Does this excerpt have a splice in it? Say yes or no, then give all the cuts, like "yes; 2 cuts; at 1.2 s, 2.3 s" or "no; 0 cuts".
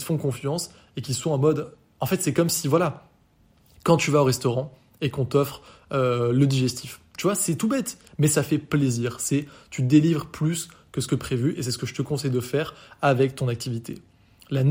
no; 0 cuts